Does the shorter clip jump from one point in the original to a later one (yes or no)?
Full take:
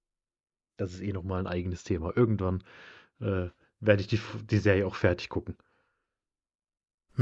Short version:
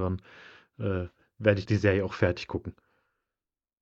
yes